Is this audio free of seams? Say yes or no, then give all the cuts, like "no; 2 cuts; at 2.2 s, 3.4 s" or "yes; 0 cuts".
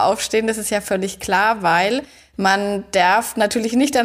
yes; 0 cuts